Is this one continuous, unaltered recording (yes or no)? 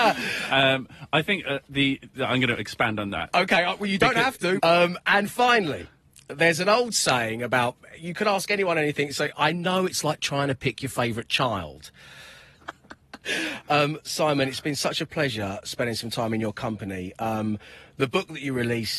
no